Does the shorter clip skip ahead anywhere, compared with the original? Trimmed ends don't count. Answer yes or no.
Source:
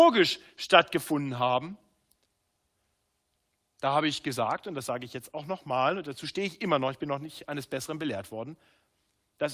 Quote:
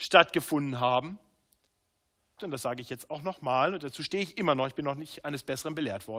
yes